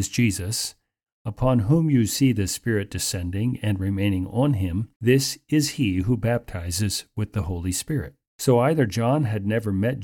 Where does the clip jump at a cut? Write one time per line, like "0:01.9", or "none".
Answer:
0:01.1
0:04.9
0:08.3